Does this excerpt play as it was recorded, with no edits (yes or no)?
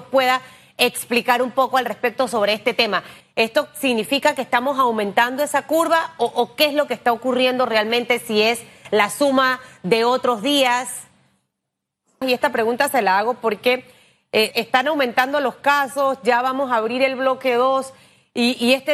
no